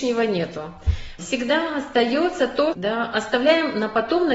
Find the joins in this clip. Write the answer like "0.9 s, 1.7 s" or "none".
1.2 s, 2.7 s